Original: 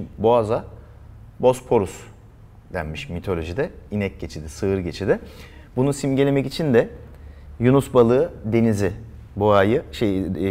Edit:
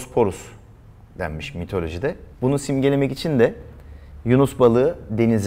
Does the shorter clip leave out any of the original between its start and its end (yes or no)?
yes